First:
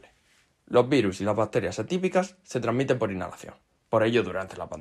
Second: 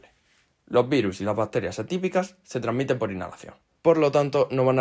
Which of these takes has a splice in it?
second; 1 cut; at 3.8 s

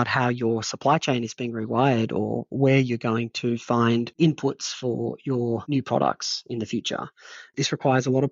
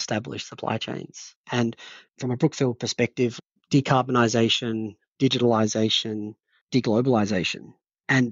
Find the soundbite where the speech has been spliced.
second; 1 cut; at 1.4 s

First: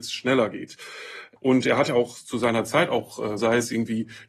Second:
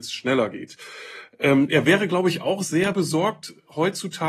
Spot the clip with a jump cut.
first; 2 cuts; at 1.4 s, 3.4 s

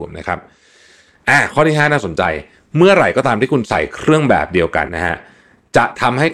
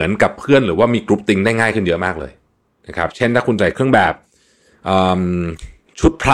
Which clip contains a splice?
first; 1 cut; at 4.9 s

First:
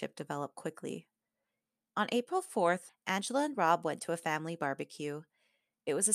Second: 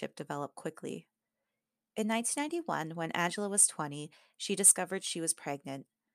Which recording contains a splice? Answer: first; 2 cuts; at 1.9 s, 2.9 s

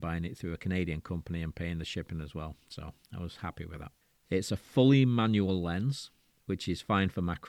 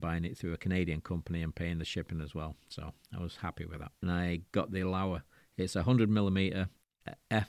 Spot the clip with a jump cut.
second; 1 cut; at 4.0 s

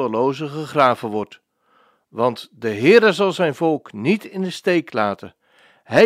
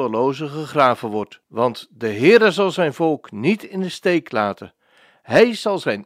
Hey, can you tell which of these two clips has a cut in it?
second; 1 cut; at 1.4 s

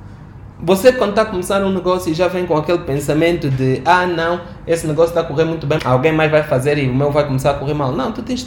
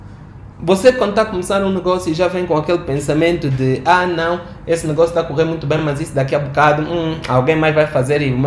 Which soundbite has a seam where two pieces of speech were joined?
first; 1 cut; at 5.8 s

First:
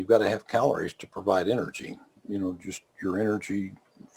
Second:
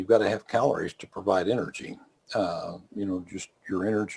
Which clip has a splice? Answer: first; 1 cut; at 2.2 s

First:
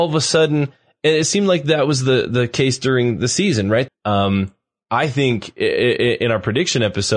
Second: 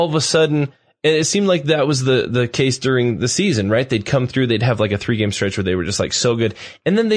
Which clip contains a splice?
first; 1 cut; at 3.9 s

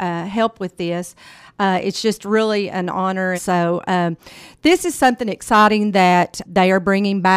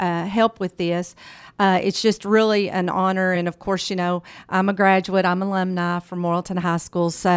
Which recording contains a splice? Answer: first; 2 cuts; at 3.3 s, 6.4 s

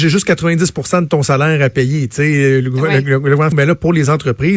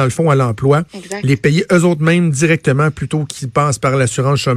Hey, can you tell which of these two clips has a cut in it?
first; 1 cut; at 3.5 s

